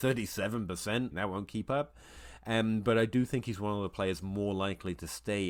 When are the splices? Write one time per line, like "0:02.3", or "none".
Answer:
0:01.1